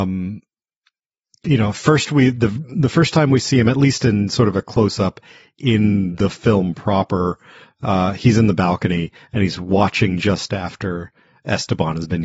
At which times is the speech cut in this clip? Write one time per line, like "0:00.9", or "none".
none

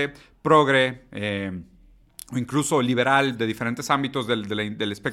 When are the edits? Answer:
none

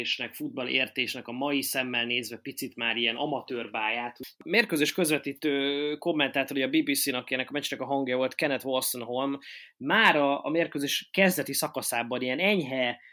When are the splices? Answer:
none

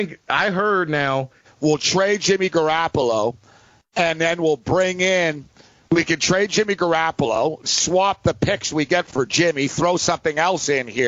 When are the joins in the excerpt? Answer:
0:01.4
0:07.6

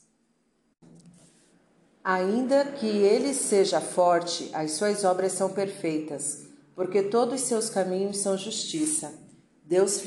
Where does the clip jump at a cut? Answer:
none

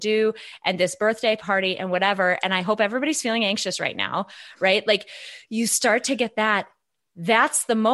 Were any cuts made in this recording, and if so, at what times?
none

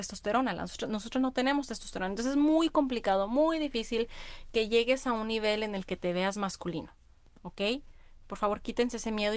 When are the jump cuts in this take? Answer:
0:04.5

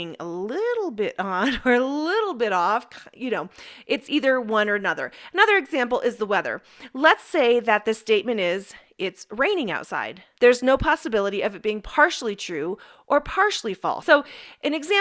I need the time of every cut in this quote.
0:10.4
0:14.0

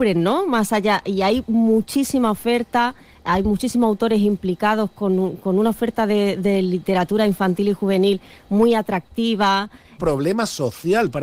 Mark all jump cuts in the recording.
0:10.0

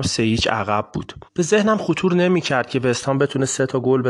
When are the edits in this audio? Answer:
0:01.3

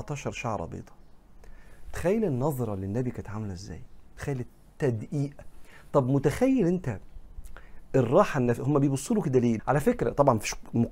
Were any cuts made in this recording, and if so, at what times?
0:09.6

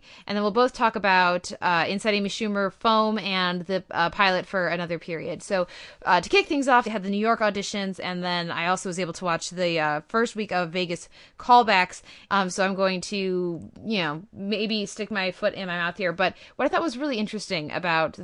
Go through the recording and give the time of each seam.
0:06.8
0:12.3

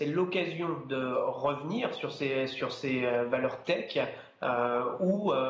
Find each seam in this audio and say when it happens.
none

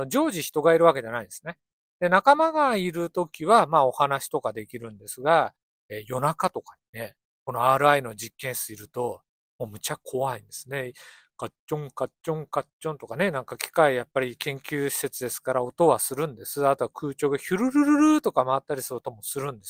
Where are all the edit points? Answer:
0:07.3

